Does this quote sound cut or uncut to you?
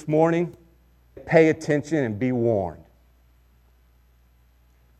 cut